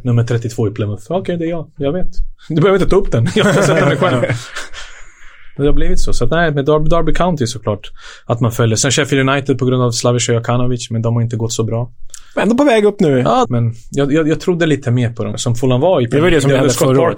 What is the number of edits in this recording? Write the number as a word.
two